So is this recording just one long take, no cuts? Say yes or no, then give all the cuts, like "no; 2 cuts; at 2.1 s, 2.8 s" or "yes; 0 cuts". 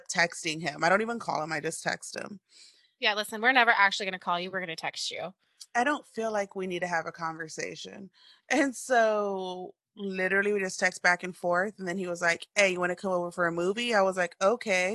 yes; 0 cuts